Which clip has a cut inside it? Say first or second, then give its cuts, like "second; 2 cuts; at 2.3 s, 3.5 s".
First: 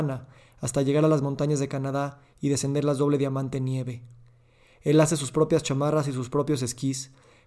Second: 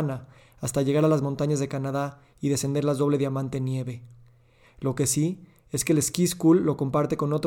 second; 1 cut; at 4.6 s